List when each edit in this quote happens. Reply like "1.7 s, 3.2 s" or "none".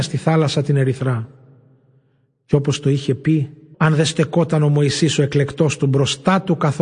3.7 s